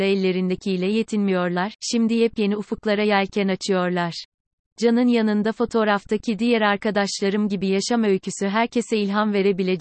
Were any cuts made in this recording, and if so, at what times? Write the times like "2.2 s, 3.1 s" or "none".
4.7 s